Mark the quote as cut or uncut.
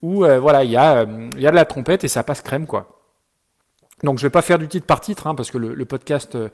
uncut